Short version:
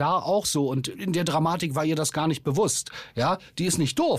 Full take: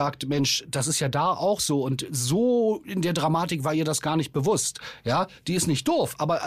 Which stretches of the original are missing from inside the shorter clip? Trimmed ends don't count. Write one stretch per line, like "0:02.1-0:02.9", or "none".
0:02.1-0:02.8